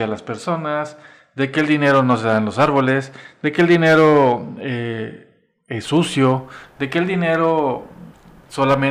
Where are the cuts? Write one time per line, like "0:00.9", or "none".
none